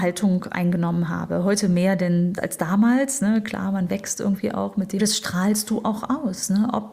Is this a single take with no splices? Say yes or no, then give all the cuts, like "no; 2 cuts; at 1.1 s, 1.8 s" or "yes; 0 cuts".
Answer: no; 2 cuts; at 2.4 s, 5.0 s